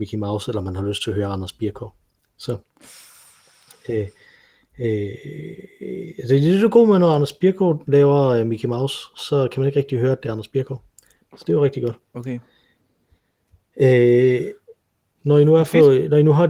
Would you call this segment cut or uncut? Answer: cut